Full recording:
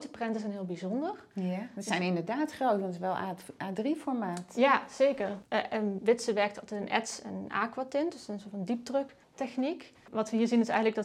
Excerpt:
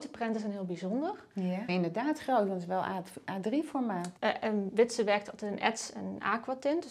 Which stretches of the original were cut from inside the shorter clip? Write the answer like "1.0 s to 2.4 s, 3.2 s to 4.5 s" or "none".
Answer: 1.7 s to 2.0 s, 4.5 s to 5.5 s

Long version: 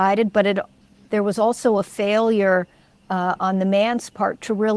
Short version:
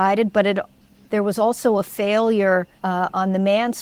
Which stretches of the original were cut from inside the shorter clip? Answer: 2.8 s to 3.0 s

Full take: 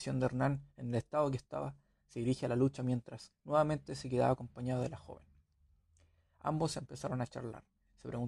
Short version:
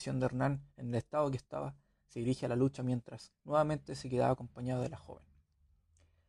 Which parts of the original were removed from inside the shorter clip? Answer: none

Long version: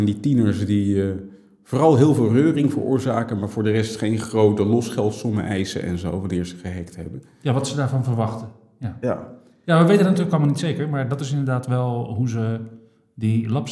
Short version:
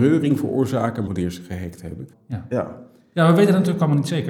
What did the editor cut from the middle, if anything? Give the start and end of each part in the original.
3.4 s to 6.2 s, 7.3 s to 8.6 s

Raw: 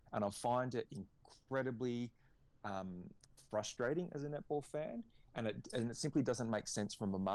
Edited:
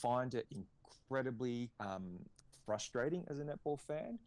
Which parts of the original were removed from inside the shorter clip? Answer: 2.1 s to 2.6 s

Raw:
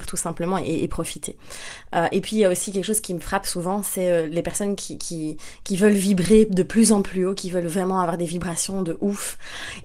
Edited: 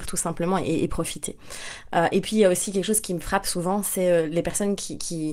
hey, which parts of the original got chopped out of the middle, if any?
none

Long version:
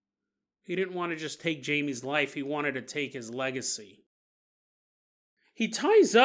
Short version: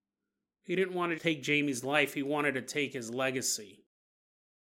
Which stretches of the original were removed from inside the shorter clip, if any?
1.2 s to 1.4 s

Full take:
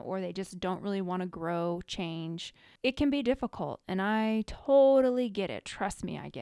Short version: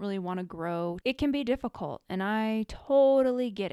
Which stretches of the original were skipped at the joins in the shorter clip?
1.8 s to 2.8 s

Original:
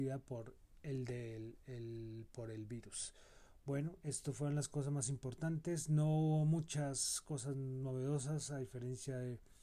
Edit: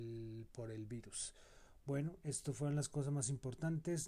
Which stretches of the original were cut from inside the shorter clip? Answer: none

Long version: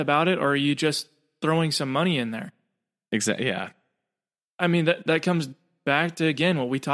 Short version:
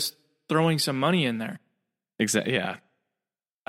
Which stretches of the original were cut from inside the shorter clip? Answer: none

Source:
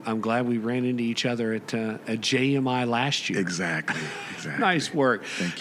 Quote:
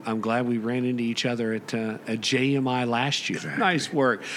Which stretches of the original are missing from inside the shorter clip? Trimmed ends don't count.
3.3 s to 4.4 s

